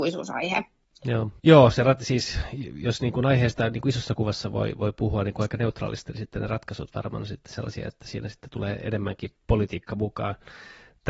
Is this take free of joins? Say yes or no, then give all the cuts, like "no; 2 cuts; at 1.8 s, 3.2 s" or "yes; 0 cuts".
no; 1 cut; at 1.4 s